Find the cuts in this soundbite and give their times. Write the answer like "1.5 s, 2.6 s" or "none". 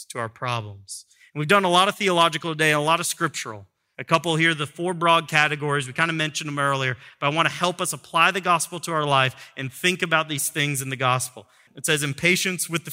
3.9 s, 11.7 s